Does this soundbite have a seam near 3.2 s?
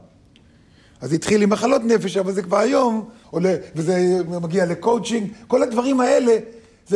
yes; 1 cut; at 3.2 s

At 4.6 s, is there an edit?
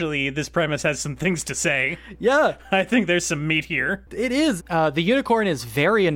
yes; 1 cut; at 4.6 s

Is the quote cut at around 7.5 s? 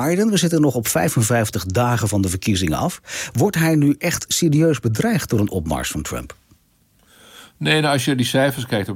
no; 0 cuts

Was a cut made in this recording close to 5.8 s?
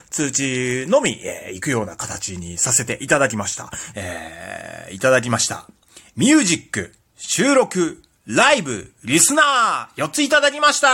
no; 1 cut; at 3.9 s

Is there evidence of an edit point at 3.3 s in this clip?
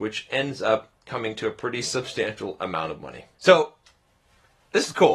yes; 1 cut; at 3.3 s

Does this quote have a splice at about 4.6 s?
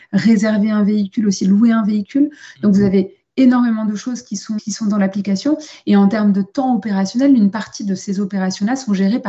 yes; 1 cut; at 4.6 s

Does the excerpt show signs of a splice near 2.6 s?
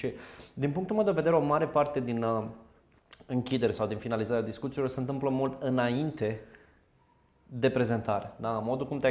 no; 0 cuts

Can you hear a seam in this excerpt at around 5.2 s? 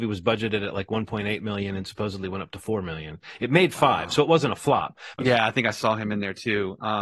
yes; 1 cut; at 5.2 s

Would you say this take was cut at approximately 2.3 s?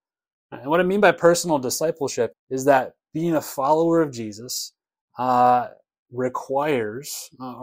yes; 1 cut; at 2.3 s

